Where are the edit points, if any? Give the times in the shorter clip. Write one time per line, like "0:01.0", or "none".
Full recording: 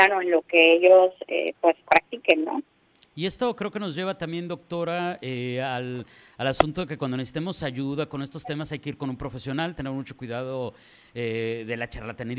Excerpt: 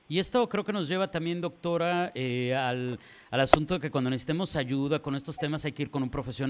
none